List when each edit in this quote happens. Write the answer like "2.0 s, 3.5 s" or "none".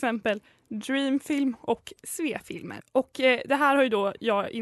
2.8 s